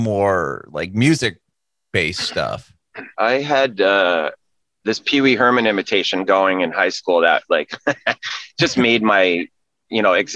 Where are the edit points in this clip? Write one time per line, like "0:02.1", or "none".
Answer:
0:03.1